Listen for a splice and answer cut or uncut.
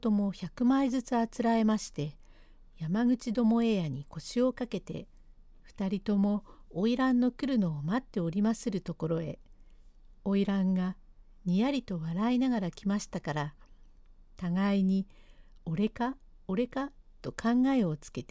uncut